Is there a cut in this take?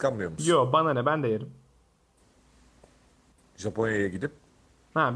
no; 0 cuts

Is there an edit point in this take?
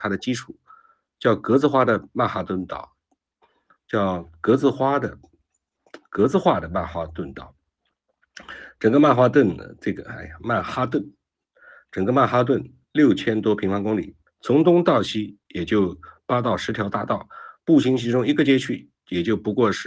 yes; 1 cut; at 14.3 s

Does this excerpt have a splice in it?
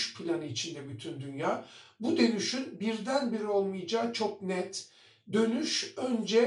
no; 0 cuts

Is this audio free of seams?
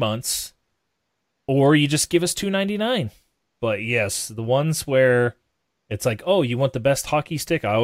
no; 1 cut; at 3.5 s

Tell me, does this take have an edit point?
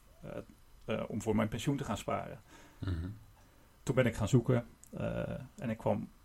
no; 0 cuts

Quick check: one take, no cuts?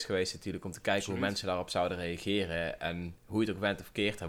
no; 1 cut; at 3.2 s

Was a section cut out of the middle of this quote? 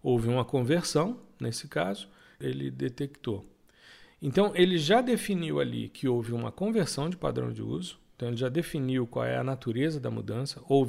no; 0 cuts

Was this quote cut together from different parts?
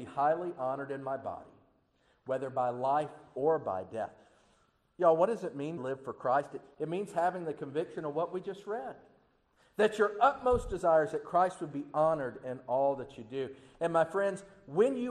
yes; 1 cut; at 5.8 s

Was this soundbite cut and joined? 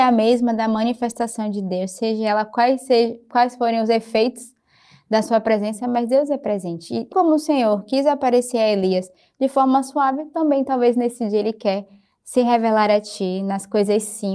yes; 1 cut; at 7.1 s

